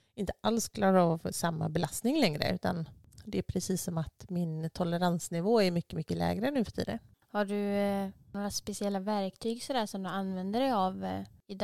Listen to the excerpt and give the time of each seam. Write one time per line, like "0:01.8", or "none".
none